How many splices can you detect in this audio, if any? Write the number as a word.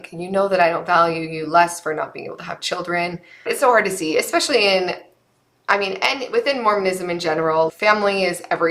two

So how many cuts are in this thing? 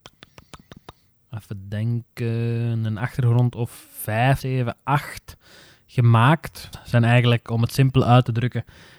two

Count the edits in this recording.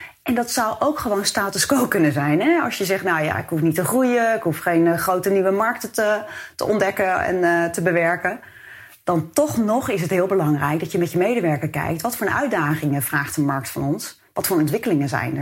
zero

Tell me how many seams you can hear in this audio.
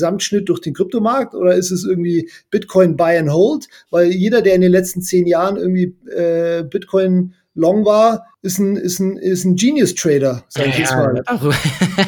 one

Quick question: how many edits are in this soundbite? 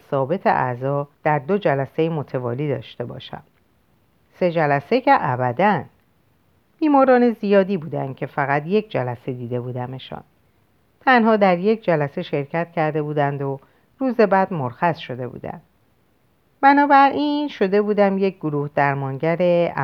one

